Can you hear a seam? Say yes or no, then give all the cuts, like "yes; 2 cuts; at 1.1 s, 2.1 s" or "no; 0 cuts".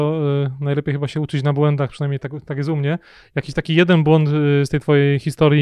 no; 0 cuts